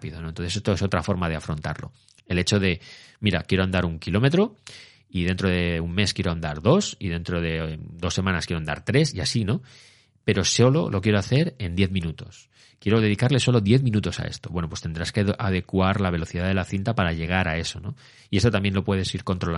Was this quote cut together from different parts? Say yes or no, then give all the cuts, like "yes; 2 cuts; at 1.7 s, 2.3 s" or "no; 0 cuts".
no; 0 cuts